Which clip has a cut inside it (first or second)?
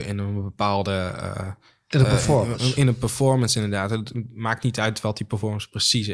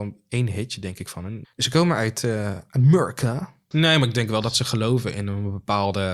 second